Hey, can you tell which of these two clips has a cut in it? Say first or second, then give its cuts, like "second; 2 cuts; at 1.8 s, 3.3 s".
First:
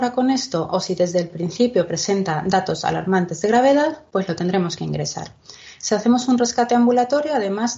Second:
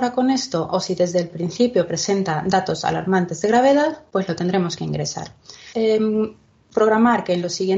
second; 1 cut; at 5.7 s